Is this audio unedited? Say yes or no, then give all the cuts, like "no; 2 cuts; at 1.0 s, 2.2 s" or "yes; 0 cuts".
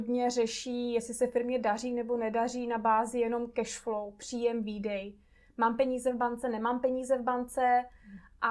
yes; 0 cuts